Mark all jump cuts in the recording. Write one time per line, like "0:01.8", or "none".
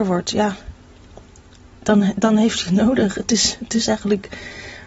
none

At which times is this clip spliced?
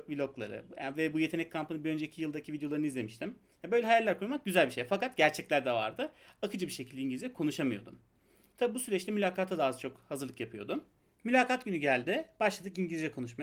none

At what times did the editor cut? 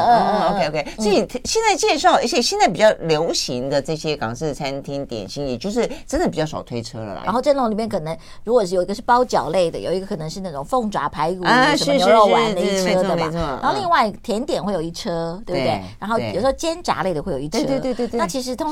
0:07.2

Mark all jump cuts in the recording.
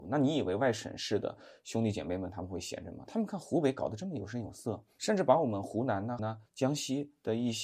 0:06.2

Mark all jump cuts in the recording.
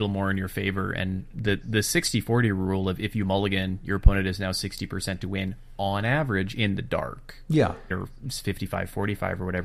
0:01.3
0:07.9

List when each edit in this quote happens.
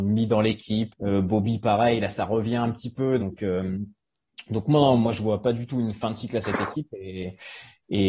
0:00.9
0:03.2

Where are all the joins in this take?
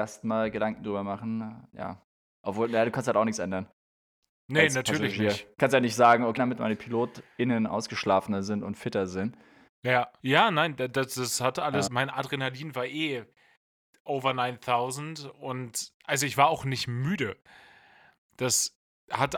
0:06.4
0:10.2
0:11.9

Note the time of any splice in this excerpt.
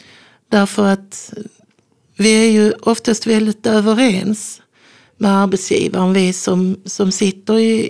none

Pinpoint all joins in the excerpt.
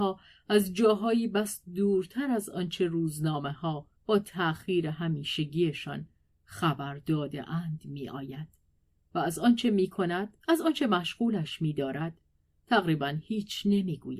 0:04.0
0:10.4

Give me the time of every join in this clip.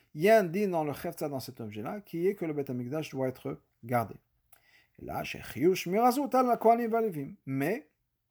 none

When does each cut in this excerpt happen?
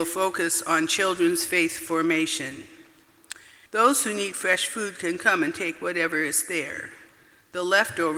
0:03.7

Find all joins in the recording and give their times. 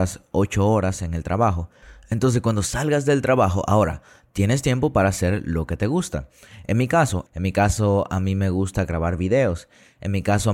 0:07.3

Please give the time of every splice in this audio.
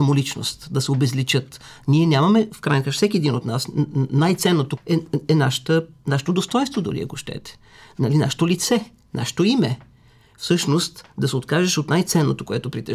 0:04.8

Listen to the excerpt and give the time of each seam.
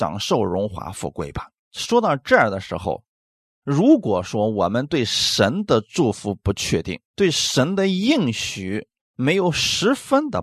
0:01.6
0:07.0

